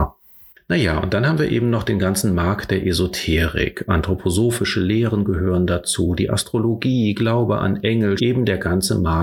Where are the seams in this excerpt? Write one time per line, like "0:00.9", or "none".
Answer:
0:08.2